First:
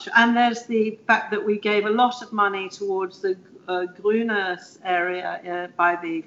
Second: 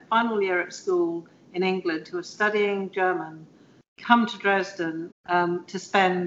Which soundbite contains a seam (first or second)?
second